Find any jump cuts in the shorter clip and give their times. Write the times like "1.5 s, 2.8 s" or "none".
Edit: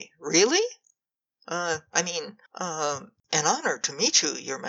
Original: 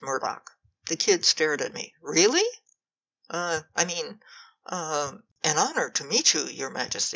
2.5 s